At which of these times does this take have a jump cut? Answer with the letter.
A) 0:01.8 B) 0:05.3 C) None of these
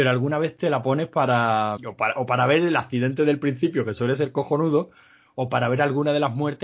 A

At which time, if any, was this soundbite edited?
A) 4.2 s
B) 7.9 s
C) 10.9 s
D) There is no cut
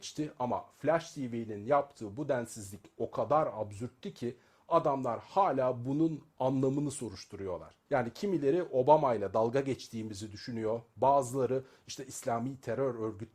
B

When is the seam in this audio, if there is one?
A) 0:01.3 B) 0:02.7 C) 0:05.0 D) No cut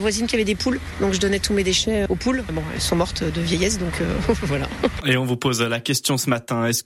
C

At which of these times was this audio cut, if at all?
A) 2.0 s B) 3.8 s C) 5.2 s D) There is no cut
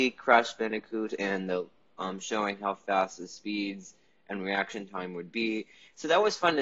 A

